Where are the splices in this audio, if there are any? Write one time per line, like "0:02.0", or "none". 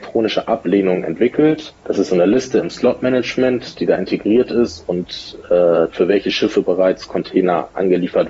0:01.8
0:05.9